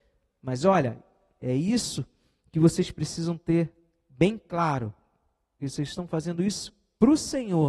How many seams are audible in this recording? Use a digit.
2